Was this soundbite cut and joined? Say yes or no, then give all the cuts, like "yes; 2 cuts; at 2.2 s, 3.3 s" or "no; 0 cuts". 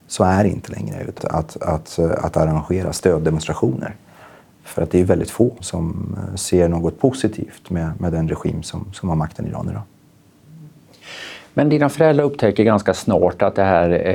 yes; 2 cuts; at 1.2 s, 5.6 s